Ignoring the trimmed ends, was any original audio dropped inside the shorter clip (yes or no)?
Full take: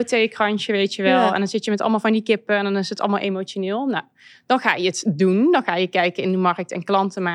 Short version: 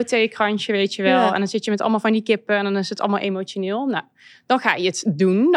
no